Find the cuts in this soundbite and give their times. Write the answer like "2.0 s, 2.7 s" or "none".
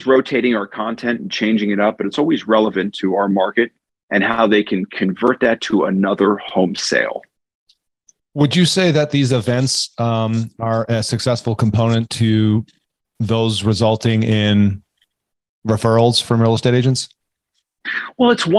none